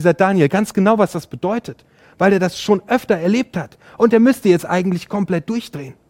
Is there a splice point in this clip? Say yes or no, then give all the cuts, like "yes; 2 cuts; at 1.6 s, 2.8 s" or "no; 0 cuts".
no; 0 cuts